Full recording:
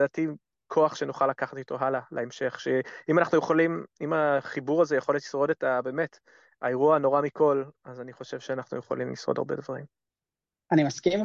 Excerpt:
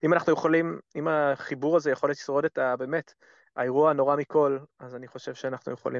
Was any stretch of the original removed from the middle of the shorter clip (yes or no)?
no